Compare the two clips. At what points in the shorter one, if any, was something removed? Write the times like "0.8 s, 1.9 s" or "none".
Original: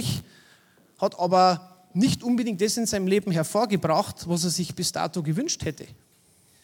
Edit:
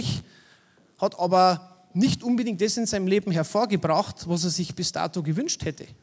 none